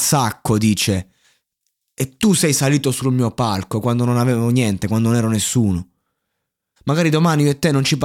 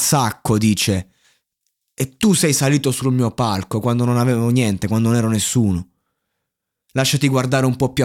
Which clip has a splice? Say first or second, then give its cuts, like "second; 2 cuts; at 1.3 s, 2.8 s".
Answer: first; 1 cut; at 6.8 s